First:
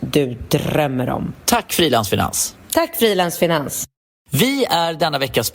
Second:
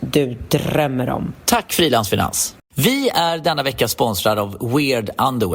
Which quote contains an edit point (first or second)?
second